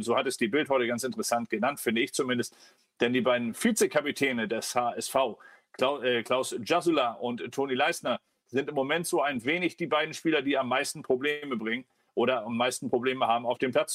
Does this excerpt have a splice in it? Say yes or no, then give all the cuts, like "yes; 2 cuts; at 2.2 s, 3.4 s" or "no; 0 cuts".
no; 0 cuts